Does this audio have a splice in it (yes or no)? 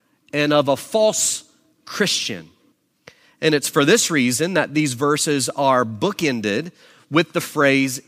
no